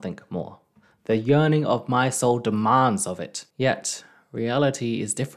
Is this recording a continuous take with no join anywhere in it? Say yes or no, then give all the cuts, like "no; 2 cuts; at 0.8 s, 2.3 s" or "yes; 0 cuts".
no; 1 cut; at 3.5 s